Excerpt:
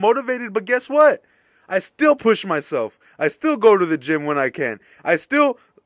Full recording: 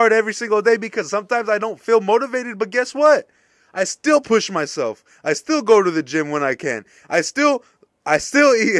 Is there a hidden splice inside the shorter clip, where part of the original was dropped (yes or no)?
no